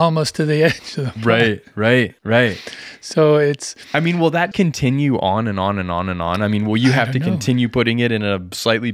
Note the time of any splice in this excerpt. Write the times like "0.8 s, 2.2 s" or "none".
2.2 s, 4.5 s